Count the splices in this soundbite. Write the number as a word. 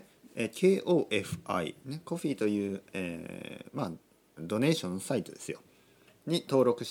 one